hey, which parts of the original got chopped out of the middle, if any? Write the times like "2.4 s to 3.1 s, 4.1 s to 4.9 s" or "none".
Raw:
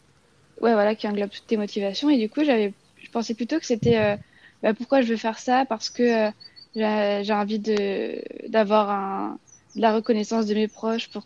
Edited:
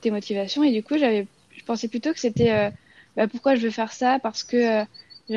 none